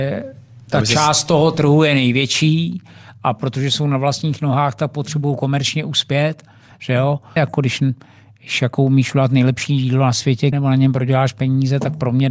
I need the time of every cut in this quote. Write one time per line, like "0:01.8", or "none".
0:07.4
0:10.5